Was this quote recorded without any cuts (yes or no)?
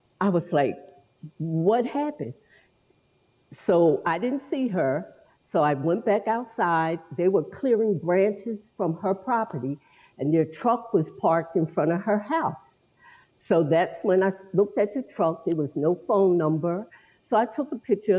yes